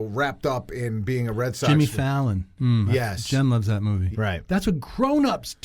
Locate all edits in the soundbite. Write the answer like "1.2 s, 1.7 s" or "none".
2.6 s, 4.1 s